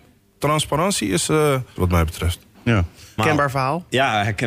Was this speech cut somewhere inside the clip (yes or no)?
yes